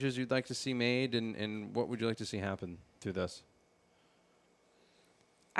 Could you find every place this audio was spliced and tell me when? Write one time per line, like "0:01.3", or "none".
none